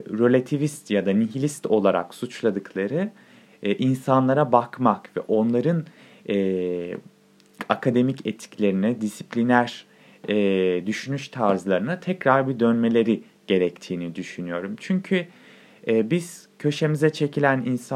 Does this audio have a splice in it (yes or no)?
no